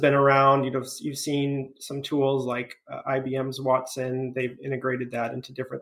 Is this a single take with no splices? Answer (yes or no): yes